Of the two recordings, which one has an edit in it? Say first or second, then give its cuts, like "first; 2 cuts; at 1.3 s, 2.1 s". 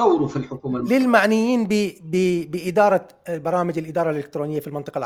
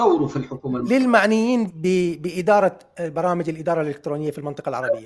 second; 1 cut; at 1.7 s